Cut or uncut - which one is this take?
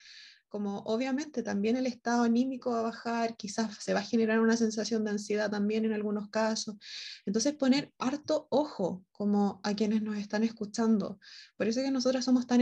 uncut